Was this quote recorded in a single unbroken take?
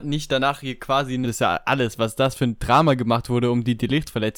no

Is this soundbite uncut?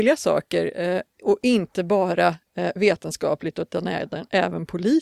yes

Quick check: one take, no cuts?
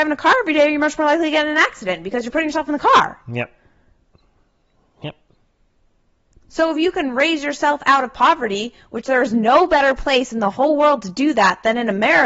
yes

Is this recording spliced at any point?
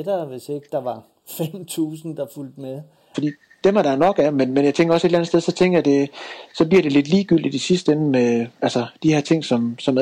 yes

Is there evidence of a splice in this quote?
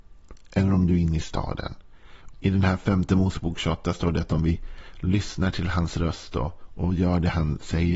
yes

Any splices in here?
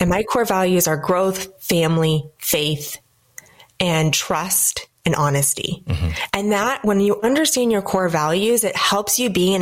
no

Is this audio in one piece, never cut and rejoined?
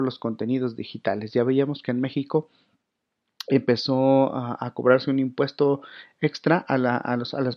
yes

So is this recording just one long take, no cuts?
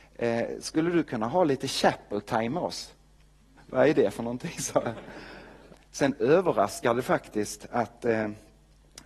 no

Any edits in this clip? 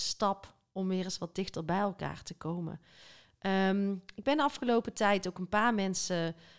no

